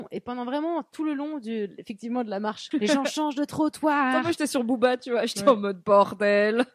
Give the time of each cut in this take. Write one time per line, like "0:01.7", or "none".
0:02.7